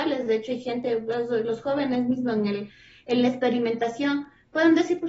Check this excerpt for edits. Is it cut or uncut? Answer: uncut